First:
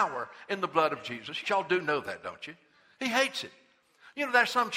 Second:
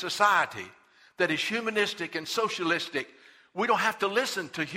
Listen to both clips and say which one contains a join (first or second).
first